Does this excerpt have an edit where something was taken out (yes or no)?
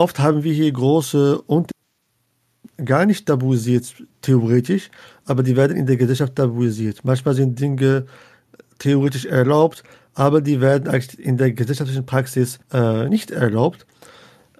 yes